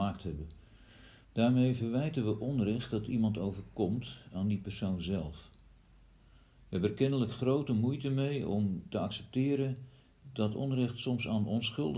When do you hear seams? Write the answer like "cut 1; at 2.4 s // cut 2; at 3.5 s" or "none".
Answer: cut 1; at 1.2 s